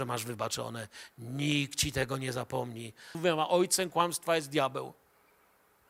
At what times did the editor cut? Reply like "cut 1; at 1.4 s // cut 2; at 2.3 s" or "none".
cut 1; at 3.1 s